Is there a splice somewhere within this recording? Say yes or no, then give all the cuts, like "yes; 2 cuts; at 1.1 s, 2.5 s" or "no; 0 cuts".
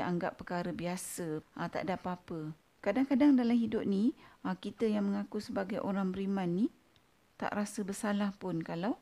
yes; 2 cuts; at 1.4 s, 2.7 s